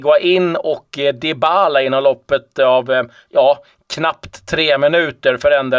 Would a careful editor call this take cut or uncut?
uncut